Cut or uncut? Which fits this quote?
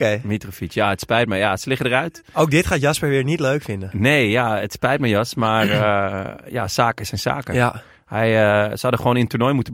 uncut